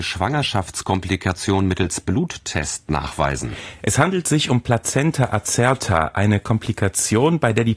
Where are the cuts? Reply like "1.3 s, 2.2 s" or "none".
none